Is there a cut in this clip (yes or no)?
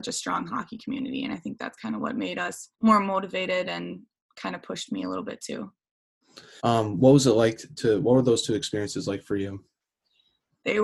yes